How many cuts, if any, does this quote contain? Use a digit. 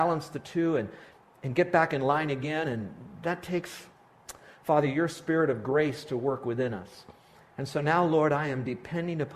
0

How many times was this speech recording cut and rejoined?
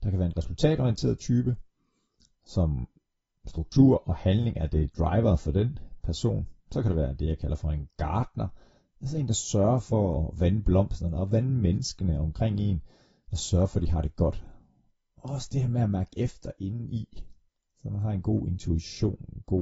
1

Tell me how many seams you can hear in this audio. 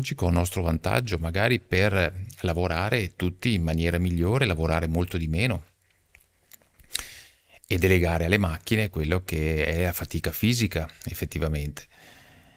0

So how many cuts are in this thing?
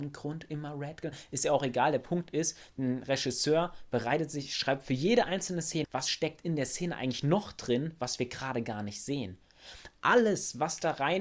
1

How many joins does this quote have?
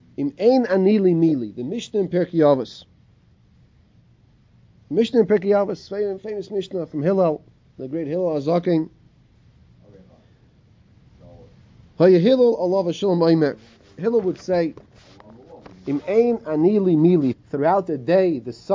1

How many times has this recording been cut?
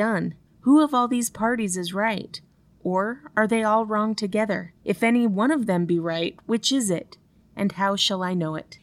1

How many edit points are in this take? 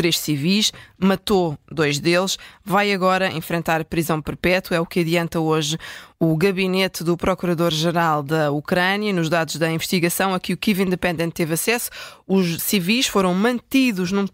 1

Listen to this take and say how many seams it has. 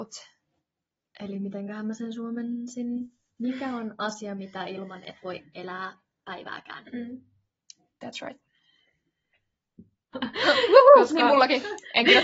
1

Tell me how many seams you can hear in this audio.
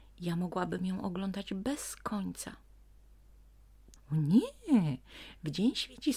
1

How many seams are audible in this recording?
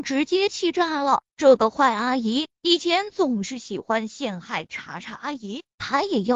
1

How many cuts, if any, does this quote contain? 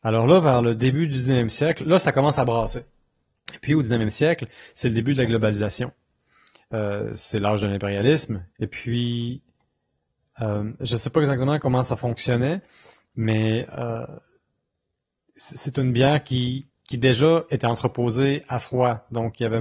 2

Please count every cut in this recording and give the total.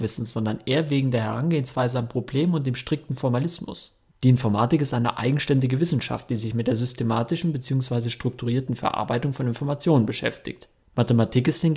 0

